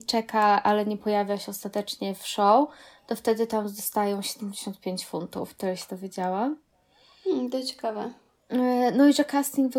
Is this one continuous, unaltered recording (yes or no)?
yes